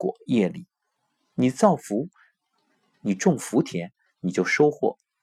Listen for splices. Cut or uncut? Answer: uncut